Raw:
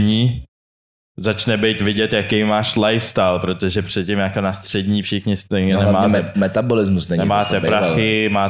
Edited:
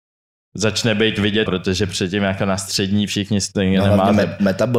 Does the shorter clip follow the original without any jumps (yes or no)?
no